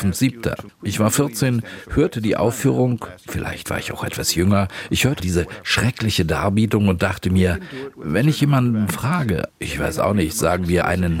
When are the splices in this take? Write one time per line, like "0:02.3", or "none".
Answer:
0:05.2